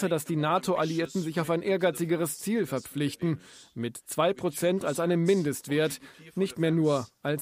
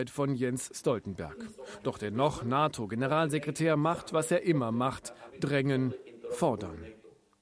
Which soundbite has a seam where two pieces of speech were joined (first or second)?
second